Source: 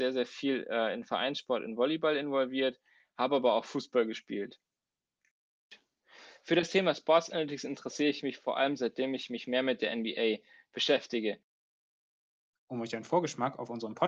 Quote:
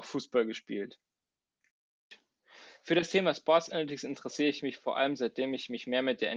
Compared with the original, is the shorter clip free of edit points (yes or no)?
yes